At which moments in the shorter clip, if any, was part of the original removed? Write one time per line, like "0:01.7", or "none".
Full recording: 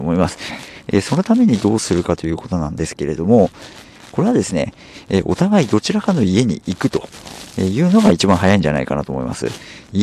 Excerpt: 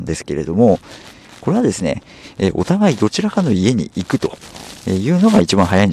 none